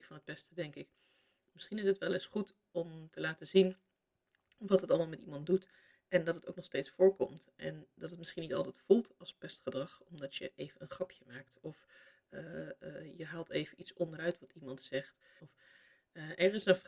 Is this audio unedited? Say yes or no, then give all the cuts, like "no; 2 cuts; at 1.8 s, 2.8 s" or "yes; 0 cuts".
no; 1 cut; at 15.4 s